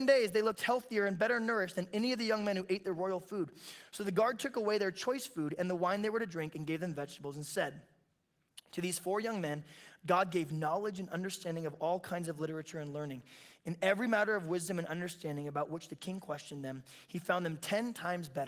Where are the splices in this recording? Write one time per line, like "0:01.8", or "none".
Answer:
0:13.6